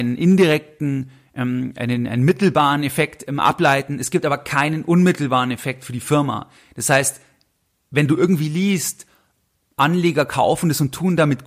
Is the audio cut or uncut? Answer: uncut